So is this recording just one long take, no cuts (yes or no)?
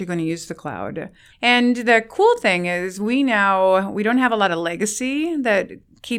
no